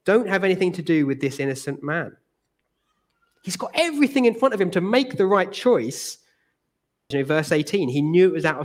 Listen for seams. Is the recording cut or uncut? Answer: cut